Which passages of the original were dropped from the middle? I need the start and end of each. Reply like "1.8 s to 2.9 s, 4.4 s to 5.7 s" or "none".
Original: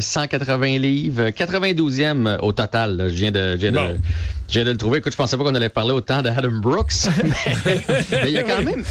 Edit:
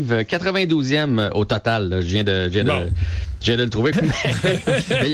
5.0 s to 7.1 s